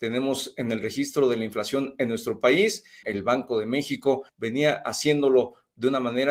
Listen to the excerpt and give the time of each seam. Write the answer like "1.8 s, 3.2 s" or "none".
3.0 s, 4.3 s